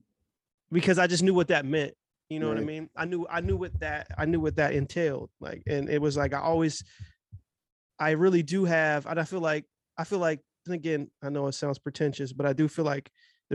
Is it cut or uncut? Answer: uncut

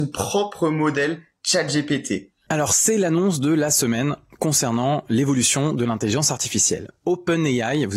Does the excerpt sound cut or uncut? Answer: uncut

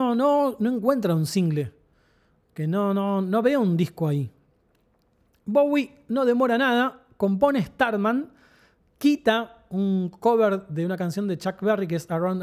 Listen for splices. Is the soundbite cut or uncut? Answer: uncut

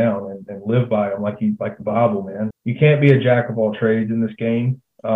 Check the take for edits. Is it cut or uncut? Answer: cut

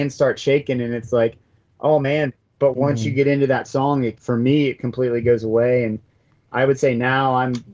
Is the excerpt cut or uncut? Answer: uncut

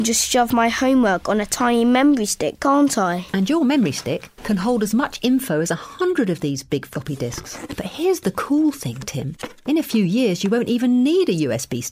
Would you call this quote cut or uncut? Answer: cut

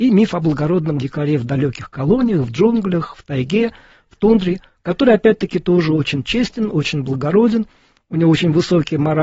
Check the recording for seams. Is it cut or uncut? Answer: uncut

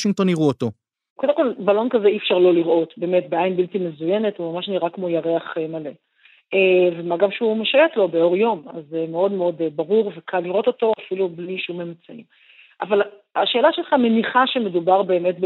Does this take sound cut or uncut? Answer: uncut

